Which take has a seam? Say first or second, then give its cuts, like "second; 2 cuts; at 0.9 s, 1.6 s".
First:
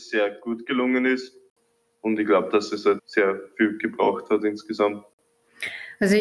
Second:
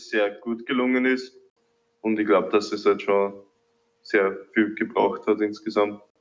first; 1 cut; at 3.0 s